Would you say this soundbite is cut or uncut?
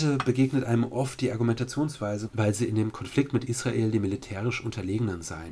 cut